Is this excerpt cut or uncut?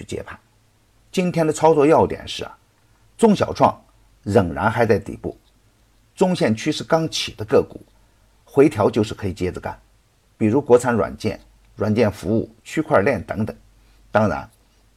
uncut